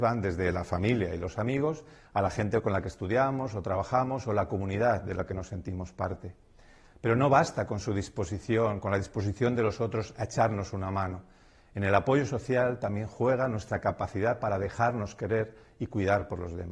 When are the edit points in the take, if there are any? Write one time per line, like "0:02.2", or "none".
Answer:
none